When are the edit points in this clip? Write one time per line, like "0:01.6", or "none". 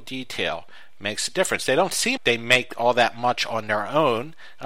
0:02.2